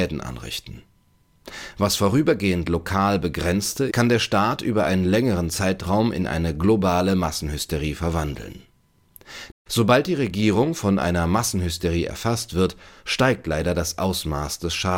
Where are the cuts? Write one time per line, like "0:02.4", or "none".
0:03.9
0:09.5